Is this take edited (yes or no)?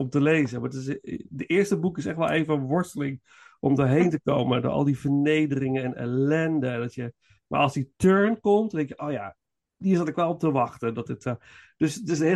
no